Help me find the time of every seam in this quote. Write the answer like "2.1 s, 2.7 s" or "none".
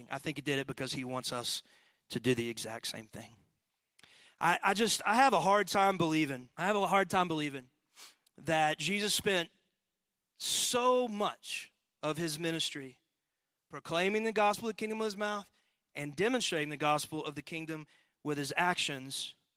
6.5 s